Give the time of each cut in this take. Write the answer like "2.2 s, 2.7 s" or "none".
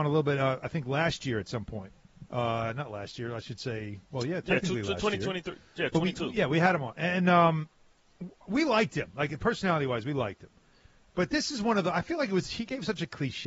none